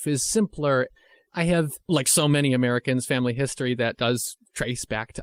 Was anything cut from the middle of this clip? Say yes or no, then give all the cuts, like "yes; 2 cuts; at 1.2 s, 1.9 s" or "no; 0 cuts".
no; 0 cuts